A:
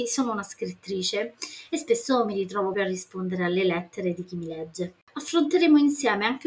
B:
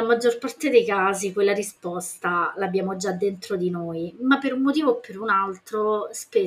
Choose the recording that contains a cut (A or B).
A